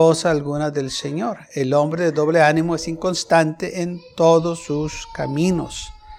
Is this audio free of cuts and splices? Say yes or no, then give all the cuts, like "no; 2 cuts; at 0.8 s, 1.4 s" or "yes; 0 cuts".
yes; 0 cuts